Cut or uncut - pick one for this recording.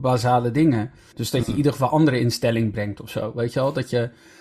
cut